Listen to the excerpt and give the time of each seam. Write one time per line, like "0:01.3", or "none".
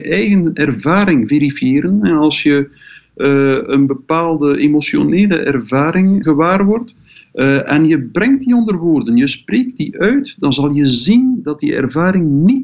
0:06.2